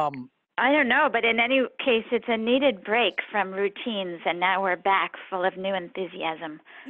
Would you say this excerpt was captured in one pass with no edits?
yes; 0 cuts

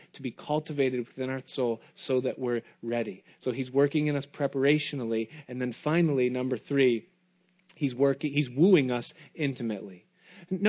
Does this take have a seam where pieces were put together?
no; 0 cuts

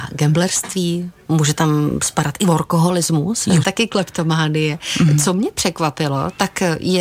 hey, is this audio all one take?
no; 1 cut; at 3.6 s

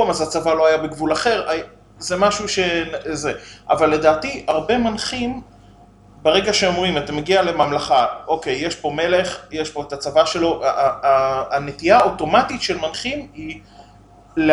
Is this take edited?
no; 0 cuts

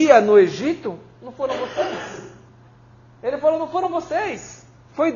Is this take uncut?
yes; 0 cuts

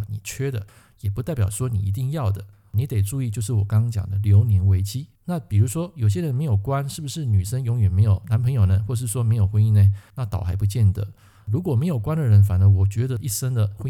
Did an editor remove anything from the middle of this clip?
yes; 1 cut; at 5.1 s

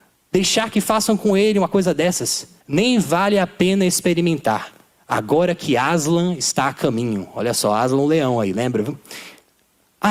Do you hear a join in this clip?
yes; 1 cut; at 2.6 s

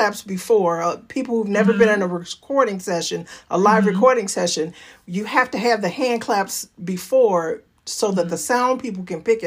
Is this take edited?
no; 0 cuts

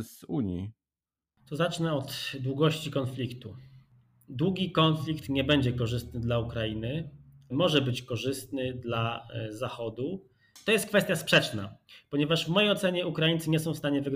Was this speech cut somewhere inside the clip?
yes; 1 cut; at 7.5 s

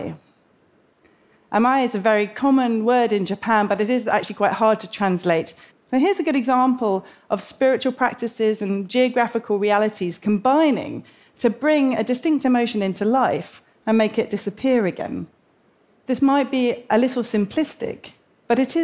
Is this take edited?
yes; 2 cuts; at 5.7 s, 16.0 s

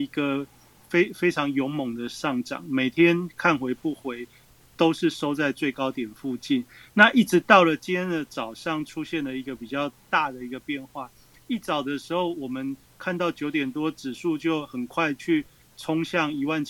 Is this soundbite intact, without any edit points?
yes; 0 cuts

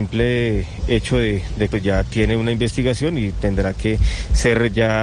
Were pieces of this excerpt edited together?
yes; 1 cut; at 1.7 s

